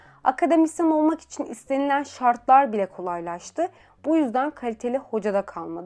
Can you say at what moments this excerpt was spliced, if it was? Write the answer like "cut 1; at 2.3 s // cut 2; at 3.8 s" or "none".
none

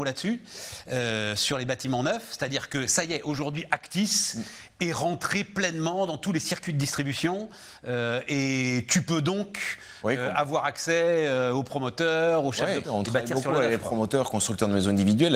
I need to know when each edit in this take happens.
cut 1; at 12.8 s

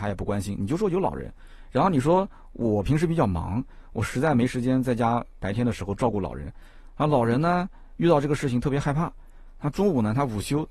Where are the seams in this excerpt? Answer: none

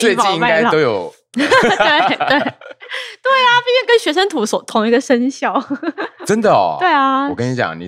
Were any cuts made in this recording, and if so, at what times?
cut 1; at 1.3 s

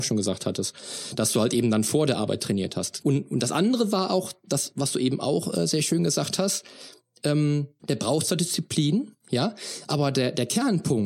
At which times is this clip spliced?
cut 1; at 3.0 s // cut 2; at 7.8 s

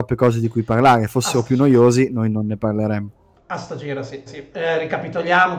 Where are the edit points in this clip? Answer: cut 1; at 4.3 s

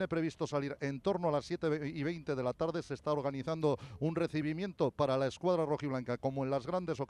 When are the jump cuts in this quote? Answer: none

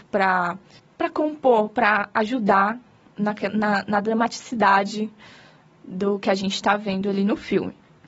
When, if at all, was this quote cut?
none

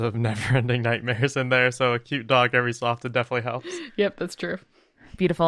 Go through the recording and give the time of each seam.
none

